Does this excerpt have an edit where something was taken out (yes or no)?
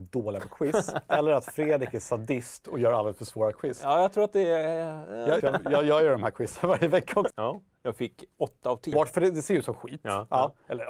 yes